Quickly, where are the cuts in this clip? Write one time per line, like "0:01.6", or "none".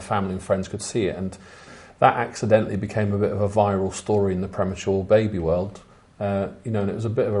none